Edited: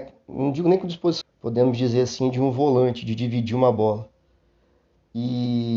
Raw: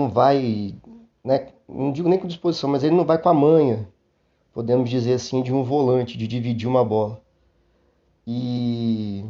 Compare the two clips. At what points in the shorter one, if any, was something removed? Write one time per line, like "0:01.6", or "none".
0:01.2